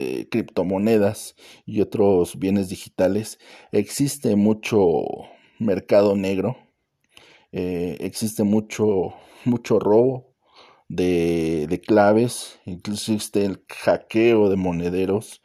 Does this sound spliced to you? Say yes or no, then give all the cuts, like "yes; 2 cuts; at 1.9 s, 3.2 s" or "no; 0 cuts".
no; 0 cuts